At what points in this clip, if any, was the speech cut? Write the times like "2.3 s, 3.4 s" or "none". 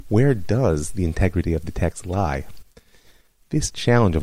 none